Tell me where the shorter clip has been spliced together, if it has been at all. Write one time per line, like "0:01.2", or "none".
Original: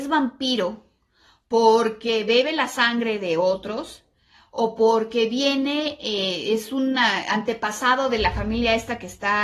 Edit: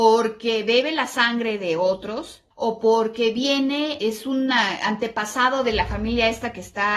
0:02.5
0:04.0